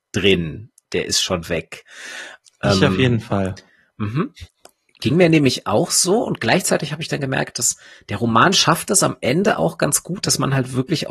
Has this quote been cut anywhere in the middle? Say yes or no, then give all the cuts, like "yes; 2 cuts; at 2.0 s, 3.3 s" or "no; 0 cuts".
yes; 1 cut; at 2.4 s